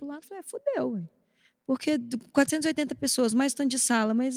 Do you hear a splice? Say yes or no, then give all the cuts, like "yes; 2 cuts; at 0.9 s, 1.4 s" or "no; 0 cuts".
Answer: no; 0 cuts